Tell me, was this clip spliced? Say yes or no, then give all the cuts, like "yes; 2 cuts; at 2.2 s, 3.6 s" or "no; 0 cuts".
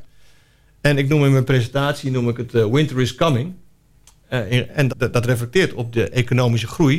yes; 1 cut; at 4.9 s